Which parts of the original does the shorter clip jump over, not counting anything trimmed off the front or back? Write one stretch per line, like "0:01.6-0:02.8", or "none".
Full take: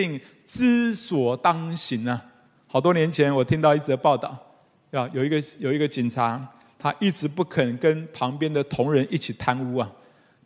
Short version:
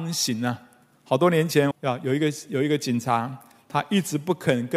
0:03.3-0:04.8